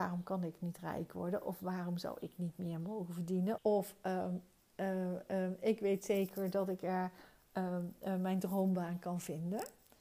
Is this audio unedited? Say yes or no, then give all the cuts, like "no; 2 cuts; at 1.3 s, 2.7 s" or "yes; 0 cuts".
no; 1 cut; at 3.6 s